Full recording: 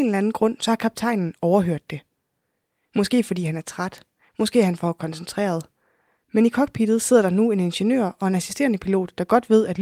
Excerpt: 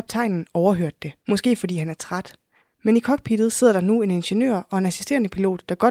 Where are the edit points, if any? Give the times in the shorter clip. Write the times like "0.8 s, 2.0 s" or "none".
1.2 s, 2.6 s